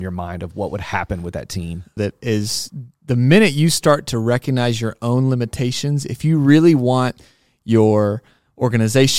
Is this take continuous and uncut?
no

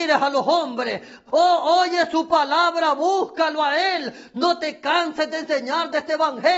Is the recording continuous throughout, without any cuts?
no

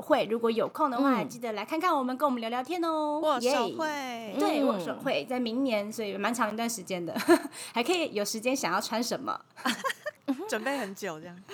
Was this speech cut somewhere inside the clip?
no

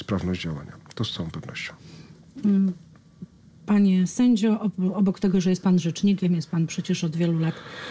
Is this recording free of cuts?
yes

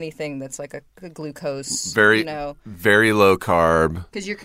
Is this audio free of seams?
yes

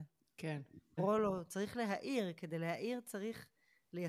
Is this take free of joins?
no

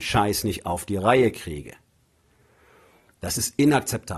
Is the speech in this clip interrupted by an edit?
no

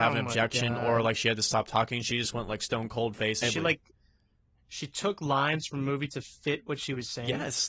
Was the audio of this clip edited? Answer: yes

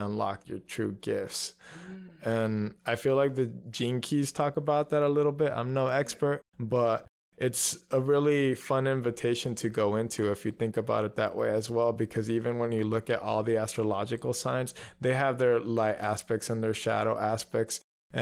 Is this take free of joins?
yes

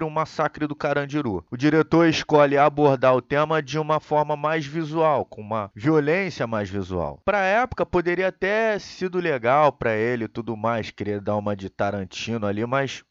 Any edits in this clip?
no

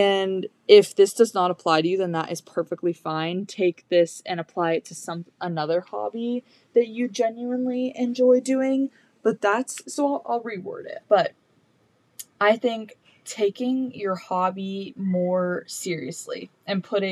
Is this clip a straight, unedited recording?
no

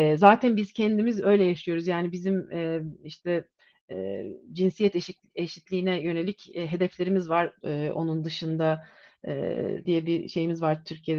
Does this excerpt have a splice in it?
yes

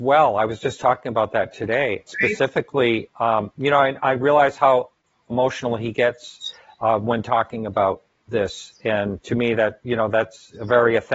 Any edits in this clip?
yes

